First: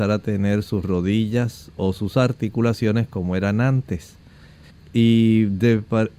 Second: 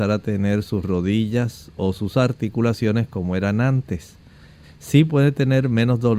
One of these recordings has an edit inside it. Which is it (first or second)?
first